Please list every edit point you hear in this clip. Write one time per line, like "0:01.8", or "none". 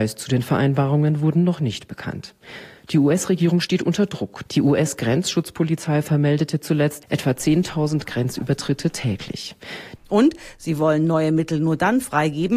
0:04.5
0:10.0